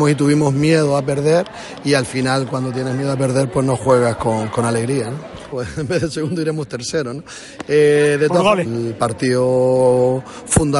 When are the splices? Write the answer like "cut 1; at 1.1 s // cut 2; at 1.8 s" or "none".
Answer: cut 1; at 5.5 s // cut 2; at 8.6 s